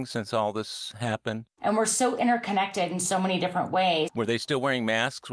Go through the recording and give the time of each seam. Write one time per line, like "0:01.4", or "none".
0:01.6
0:04.1